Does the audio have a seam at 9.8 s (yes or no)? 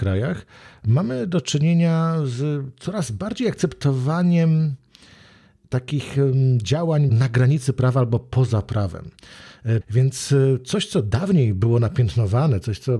yes